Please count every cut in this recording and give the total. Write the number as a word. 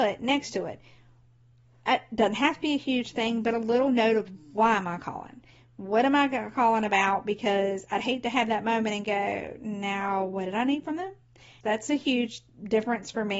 one